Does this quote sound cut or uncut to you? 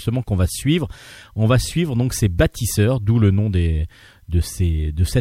uncut